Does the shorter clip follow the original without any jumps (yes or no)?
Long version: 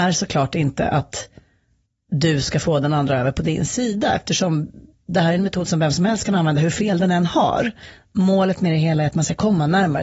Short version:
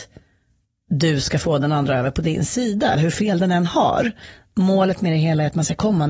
no